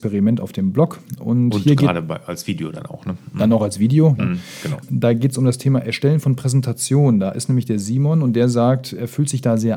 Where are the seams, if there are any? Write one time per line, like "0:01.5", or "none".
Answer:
0:04.2